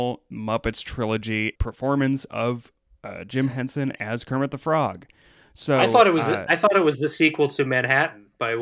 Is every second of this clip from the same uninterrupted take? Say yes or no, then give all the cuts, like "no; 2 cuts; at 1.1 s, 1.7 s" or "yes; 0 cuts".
no; 1 cut; at 1.5 s